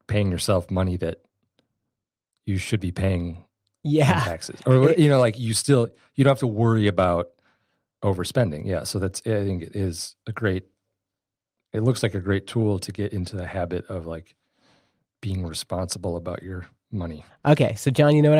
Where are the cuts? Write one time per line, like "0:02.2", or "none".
0:17.3